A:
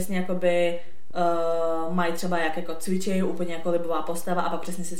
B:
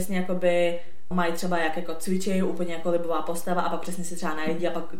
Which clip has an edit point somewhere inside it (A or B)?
B